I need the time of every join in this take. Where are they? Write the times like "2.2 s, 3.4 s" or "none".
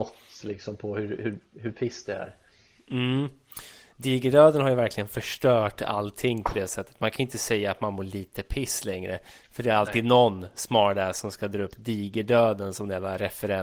none